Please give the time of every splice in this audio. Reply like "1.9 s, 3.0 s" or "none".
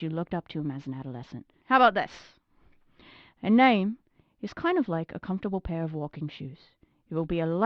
1.6 s